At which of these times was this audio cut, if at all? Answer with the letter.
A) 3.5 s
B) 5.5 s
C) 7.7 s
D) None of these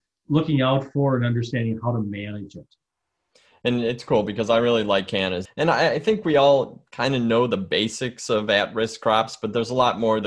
B